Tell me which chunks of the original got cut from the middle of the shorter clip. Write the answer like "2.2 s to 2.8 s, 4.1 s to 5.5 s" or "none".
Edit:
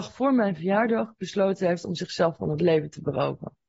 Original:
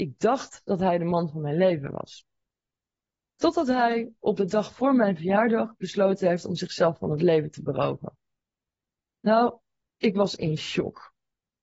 none

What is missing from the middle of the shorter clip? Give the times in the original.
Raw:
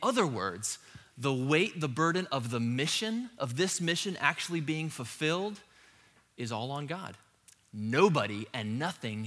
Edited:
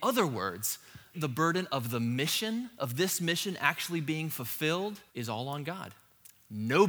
1.1 s to 1.7 s, 5.7 s to 6.3 s

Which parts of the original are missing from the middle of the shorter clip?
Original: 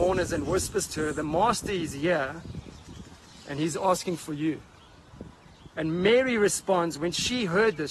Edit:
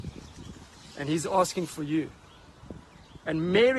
none

